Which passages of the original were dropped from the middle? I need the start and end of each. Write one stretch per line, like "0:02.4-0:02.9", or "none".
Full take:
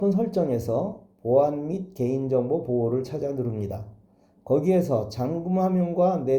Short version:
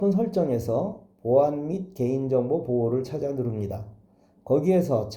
none